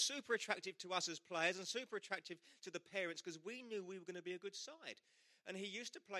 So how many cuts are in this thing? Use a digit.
0